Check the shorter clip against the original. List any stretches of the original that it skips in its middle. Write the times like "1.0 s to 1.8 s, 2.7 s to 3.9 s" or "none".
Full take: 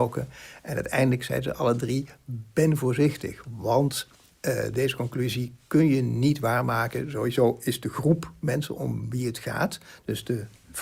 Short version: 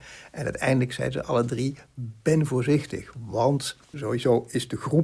4.2 s to 7.1 s